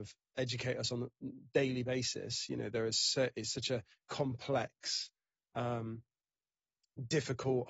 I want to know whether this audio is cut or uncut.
uncut